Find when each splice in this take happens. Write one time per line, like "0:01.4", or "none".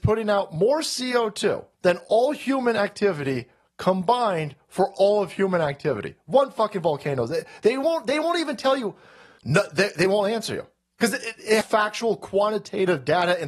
0:01.7
0:09.4
0:11.6